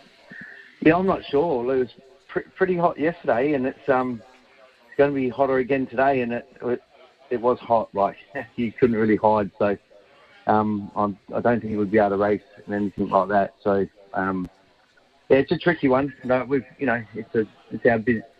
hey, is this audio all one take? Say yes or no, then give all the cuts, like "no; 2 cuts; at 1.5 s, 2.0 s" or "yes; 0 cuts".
yes; 0 cuts